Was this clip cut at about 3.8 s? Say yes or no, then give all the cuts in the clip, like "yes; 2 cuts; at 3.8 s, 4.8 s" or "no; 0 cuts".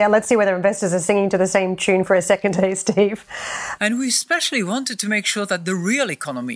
yes; 1 cut; at 3.8 s